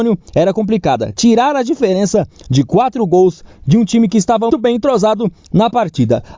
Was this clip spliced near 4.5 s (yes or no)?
yes